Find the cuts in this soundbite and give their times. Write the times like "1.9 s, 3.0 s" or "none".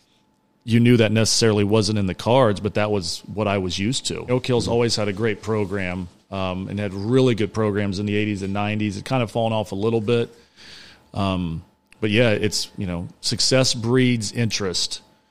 4.3 s